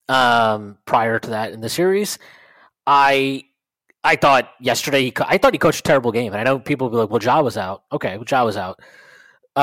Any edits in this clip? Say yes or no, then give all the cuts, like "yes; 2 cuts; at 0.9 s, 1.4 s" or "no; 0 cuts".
no; 0 cuts